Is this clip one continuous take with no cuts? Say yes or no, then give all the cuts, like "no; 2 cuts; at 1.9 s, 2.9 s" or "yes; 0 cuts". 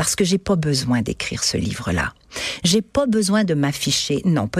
yes; 0 cuts